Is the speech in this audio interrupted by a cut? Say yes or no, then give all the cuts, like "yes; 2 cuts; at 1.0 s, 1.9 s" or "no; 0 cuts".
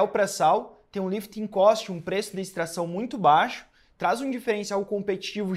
no; 0 cuts